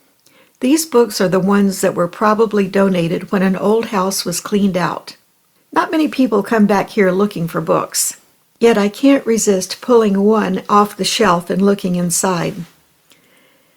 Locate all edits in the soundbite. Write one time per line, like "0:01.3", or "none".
0:05.6